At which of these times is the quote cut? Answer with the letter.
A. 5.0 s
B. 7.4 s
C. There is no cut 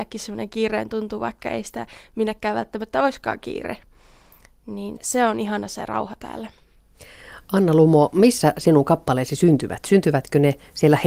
A